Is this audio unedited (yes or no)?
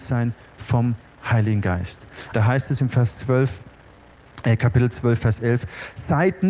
no